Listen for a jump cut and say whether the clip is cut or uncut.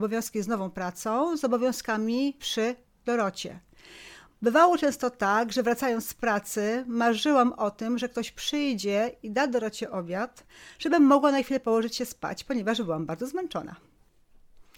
uncut